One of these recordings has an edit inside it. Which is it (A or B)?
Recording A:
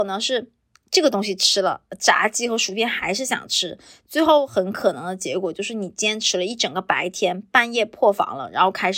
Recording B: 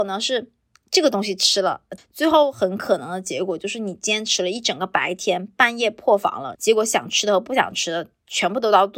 B